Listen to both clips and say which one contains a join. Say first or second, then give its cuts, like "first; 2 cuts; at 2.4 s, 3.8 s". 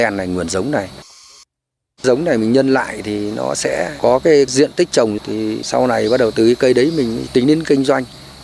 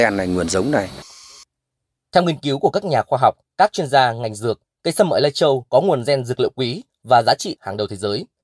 first; 1 cut; at 2.0 s